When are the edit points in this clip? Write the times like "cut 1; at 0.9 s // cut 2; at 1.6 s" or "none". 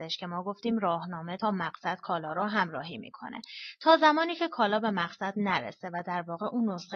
none